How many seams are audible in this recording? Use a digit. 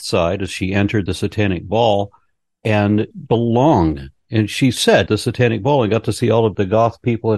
2